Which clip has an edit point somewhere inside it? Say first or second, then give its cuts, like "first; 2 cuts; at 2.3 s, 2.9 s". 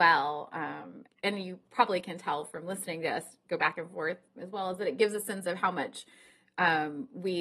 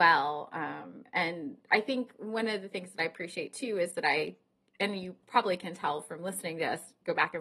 first; 2 cuts; at 1.1 s, 4.4 s